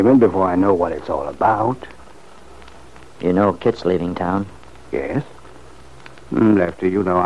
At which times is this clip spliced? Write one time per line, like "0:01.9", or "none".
0:06.2